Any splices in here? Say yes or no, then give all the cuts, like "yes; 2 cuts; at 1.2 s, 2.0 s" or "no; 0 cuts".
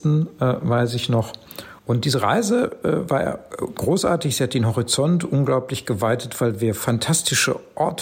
yes; 1 cut; at 1.8 s